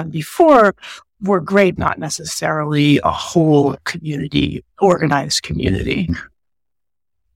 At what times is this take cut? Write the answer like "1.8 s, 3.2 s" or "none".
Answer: 1.8 s, 4.7 s

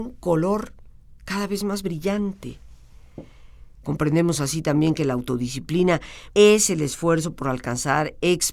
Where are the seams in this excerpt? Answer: 3.8 s, 6.3 s

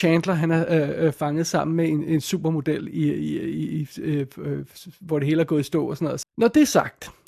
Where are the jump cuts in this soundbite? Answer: 6.2 s

